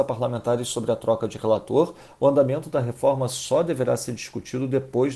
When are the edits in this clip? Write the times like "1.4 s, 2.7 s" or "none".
none

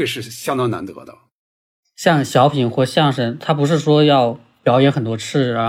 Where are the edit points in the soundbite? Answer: none

